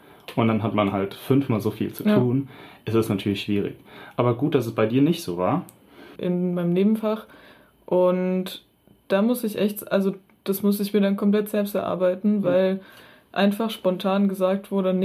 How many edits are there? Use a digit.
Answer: 1